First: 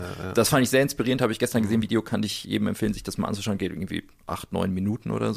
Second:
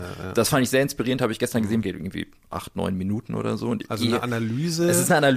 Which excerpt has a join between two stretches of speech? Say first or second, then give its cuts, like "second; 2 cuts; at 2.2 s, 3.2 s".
second; 1 cut; at 1.8 s